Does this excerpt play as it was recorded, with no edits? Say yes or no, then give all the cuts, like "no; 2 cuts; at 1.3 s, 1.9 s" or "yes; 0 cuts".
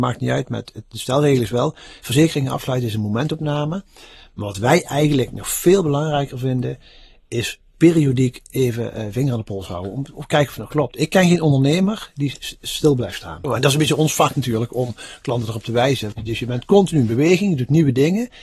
no; 2 cuts; at 13.4 s, 16.1 s